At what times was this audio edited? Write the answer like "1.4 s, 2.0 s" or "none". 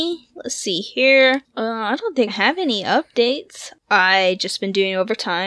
2.3 s